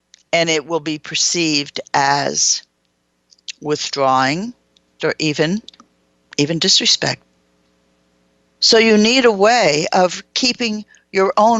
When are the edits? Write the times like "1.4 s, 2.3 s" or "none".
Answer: 5.0 s